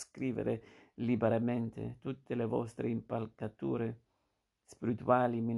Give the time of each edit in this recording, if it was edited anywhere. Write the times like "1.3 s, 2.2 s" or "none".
none